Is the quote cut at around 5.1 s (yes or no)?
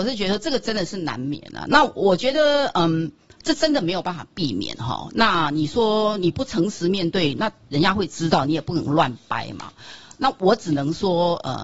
no